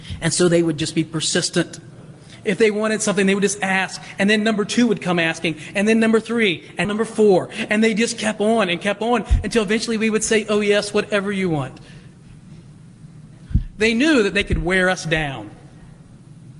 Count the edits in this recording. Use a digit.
1